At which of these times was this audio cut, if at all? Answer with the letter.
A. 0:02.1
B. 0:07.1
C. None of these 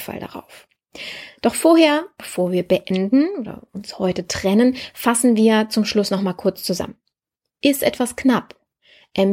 C